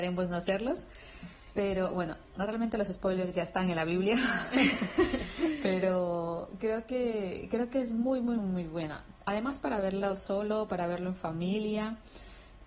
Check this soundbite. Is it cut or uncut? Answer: cut